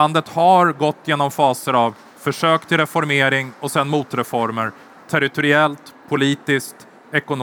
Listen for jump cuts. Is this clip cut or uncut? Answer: cut